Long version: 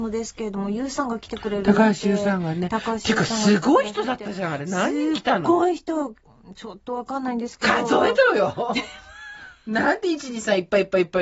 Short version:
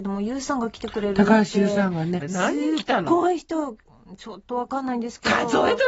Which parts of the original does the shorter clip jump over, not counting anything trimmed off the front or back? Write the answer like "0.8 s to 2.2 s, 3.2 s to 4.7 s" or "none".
2.7 s to 4.6 s